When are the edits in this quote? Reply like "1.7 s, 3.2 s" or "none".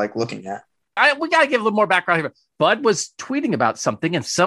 1.0 s, 2.5 s